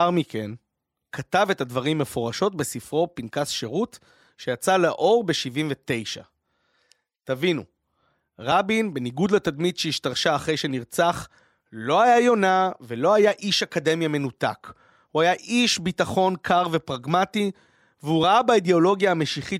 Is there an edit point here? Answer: no; 0 cuts

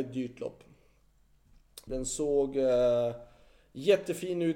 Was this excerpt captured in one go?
no; 1 cut; at 1.9 s

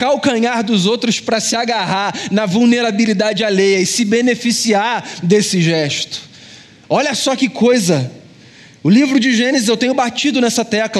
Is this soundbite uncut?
yes; 0 cuts

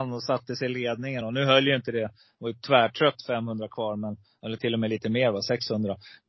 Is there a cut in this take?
no; 0 cuts

